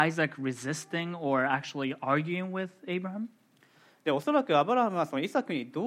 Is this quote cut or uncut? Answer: uncut